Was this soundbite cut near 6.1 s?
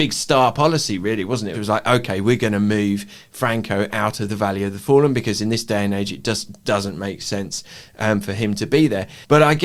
no; 1 cut; at 1.5 s

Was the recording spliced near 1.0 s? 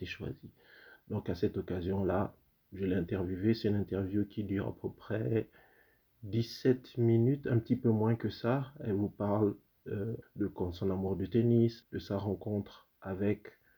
no; 2 cuts; at 10.2 s, 11.8 s

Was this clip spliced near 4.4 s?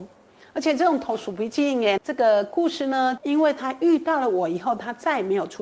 no; 2 cuts; at 2.0 s, 3.2 s

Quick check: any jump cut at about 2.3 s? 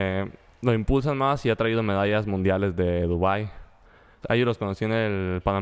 no; 1 cut; at 4.2 s

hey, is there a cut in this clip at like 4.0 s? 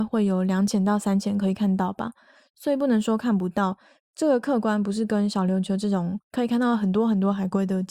yes; 1 cut; at 4.0 s

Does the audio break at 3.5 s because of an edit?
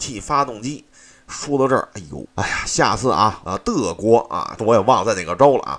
yes; 3 cuts; at 2.3 s, 3.5 s, 4.6 s

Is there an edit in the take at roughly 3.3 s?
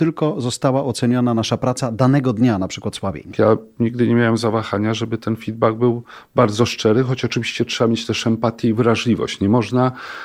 yes; 1 cut; at 3.3 s

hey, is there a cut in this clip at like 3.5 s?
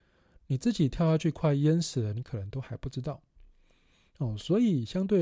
no; 0 cuts

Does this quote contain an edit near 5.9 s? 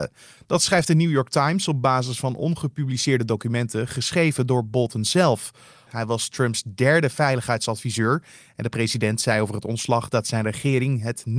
yes; 1 cut; at 5.9 s

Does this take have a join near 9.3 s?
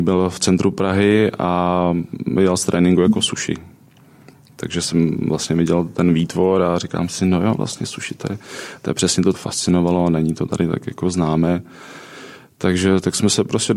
yes; 1 cut; at 9.3 s

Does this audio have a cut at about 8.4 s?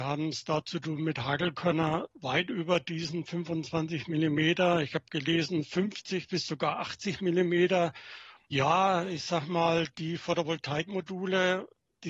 yes; 1 cut; at 8.4 s

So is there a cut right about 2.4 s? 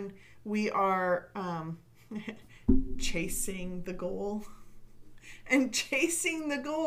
no; 0 cuts

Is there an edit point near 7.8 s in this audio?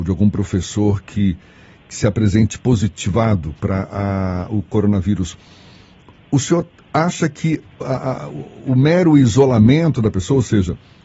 yes; 1 cut; at 7.8 s

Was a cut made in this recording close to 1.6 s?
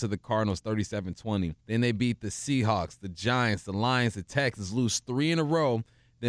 yes; 1 cut; at 1.6 s

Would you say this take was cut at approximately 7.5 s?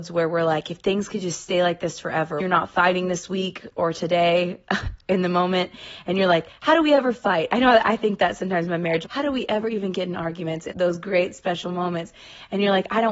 no; 3 cuts; at 2.4 s, 9.0 s, 10.7 s

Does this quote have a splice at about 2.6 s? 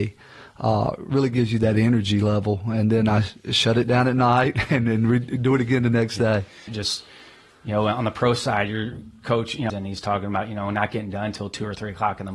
no; 2 cuts; at 6.7 s, 9.7 s

